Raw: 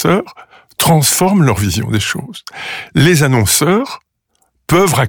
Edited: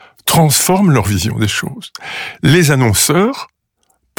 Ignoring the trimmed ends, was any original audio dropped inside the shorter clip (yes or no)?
no